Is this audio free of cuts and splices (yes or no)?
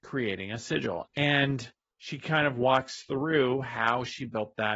no